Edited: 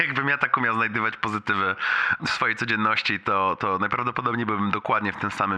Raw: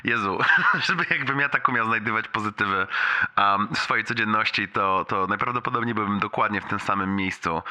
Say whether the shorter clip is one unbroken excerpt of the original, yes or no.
no